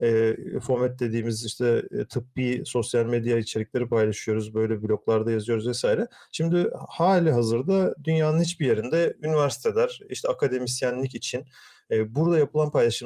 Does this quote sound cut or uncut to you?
uncut